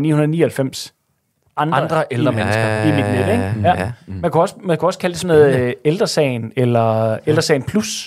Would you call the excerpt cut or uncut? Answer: uncut